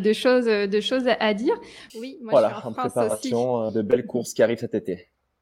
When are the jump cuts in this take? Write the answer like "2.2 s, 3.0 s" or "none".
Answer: 1.9 s

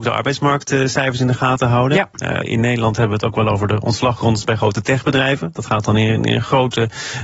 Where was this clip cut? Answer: 2.4 s

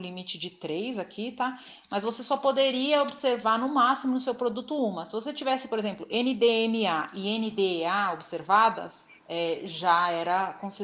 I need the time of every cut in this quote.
none

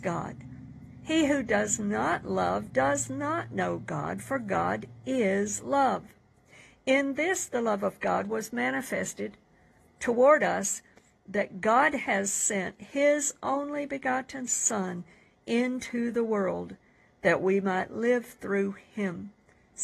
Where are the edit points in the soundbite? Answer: none

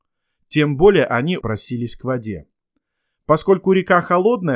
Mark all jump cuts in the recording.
1.4 s

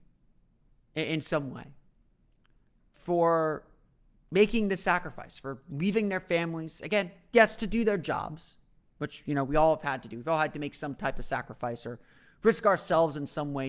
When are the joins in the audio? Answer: none

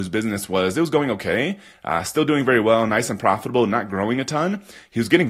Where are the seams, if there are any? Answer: none

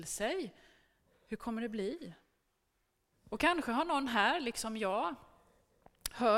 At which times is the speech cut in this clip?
1.1 s, 3.1 s

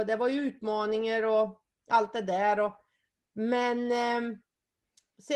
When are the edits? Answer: none

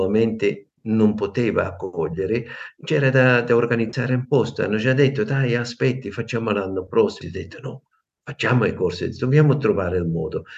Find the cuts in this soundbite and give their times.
7.2 s

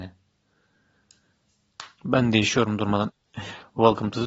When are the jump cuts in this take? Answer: 2.0 s, 3.1 s

